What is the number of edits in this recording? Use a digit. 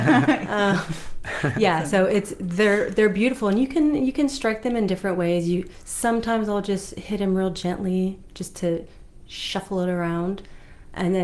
1